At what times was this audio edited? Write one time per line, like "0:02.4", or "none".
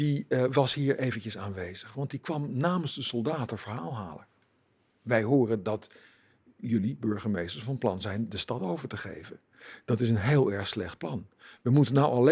none